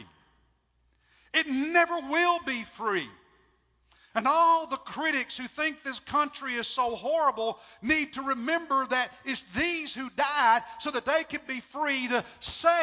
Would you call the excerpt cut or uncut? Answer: uncut